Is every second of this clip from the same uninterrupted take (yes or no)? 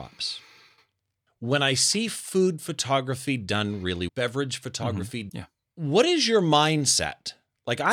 no